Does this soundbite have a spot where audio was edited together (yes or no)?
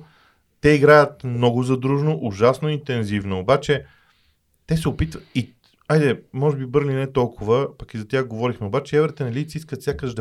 no